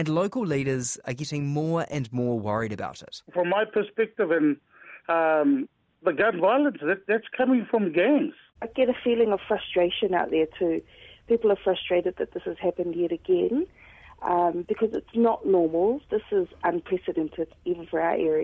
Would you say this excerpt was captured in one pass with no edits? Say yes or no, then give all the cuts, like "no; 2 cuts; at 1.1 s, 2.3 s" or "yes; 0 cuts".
yes; 0 cuts